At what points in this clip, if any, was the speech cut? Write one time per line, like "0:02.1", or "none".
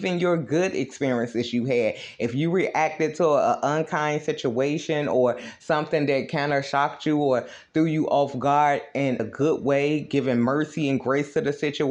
0:09.2

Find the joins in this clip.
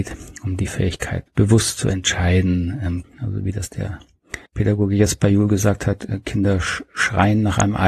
0:01.3
0:03.0
0:04.5

